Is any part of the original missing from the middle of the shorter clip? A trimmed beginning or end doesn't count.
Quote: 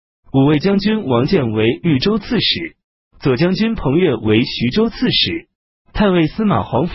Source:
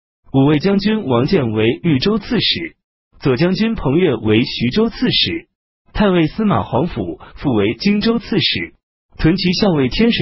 no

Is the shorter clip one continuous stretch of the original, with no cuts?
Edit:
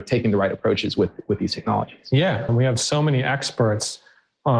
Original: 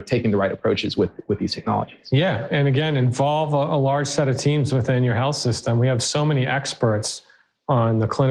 no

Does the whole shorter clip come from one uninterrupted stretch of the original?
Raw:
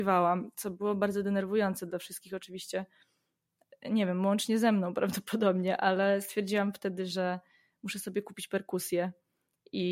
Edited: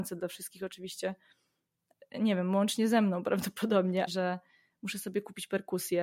no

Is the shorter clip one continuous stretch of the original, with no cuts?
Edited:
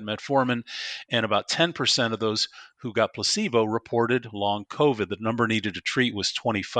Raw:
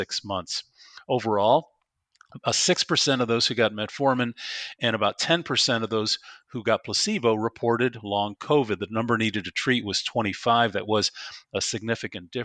yes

